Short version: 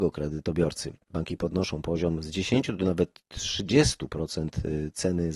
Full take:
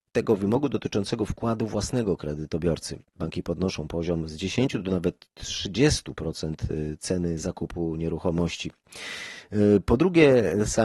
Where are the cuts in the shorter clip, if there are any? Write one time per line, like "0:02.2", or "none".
none